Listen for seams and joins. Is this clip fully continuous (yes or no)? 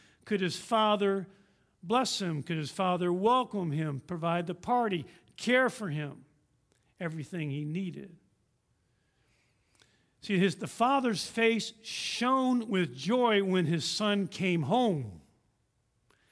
yes